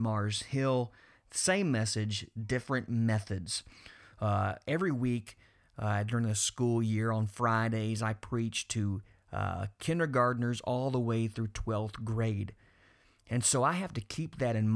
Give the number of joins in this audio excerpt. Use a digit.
0